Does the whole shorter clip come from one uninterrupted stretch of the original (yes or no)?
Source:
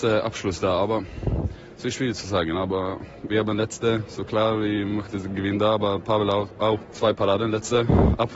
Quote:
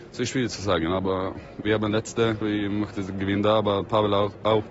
no